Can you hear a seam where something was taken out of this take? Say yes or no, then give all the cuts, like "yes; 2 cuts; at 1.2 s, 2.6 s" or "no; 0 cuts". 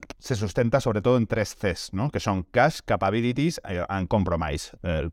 no; 0 cuts